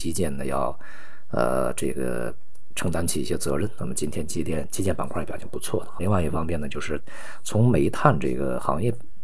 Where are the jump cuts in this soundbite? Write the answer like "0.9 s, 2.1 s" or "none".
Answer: 6.0 s

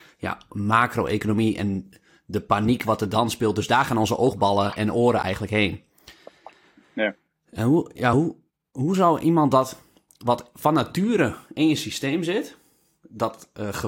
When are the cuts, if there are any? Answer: none

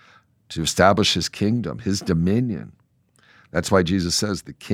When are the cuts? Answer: none

